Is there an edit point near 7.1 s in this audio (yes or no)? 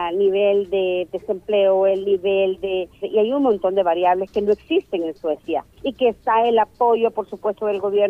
no